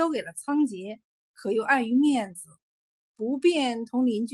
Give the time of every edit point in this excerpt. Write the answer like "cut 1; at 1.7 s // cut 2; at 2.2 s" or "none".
cut 1; at 1.3 s

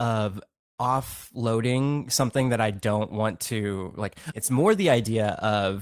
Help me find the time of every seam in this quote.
cut 1; at 4.3 s

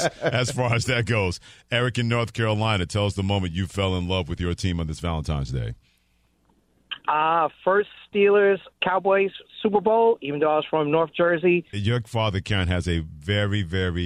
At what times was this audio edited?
cut 1; at 8.7 s // cut 2; at 11.7 s

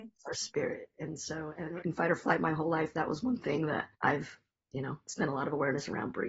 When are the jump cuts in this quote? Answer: cut 1; at 1.8 s // cut 2; at 3.9 s

